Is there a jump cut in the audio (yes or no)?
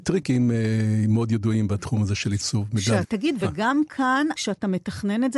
yes